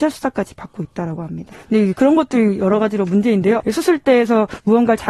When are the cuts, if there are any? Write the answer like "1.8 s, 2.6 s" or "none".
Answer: 1.5 s, 3.6 s